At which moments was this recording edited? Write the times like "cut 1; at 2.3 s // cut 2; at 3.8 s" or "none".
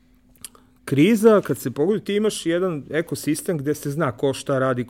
none